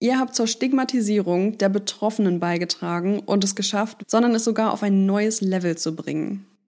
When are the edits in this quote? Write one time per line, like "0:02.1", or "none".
0:04.0